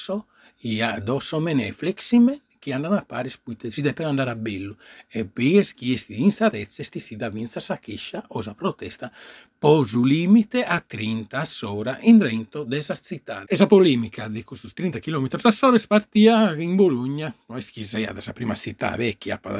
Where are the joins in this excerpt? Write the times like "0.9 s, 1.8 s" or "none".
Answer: 13.4 s